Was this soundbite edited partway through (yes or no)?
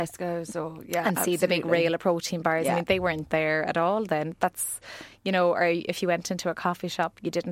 no